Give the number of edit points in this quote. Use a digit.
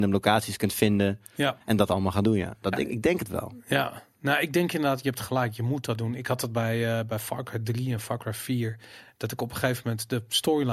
0